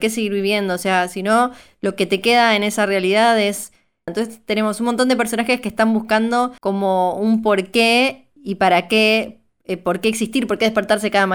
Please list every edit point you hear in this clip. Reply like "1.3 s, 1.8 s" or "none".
4.1 s, 6.6 s, 8.4 s